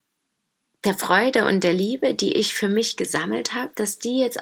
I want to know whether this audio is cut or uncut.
uncut